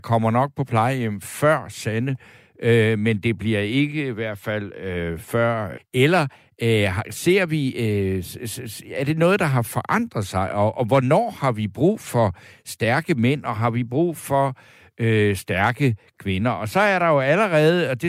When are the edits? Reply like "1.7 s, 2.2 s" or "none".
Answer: 5.8 s